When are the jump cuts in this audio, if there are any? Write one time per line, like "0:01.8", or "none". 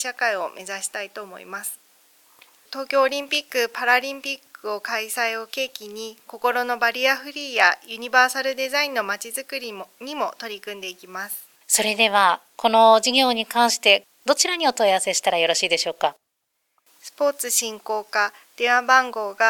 0:11.5

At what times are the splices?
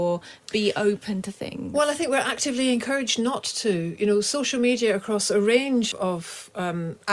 0:05.9

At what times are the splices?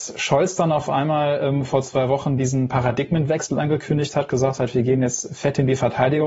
none

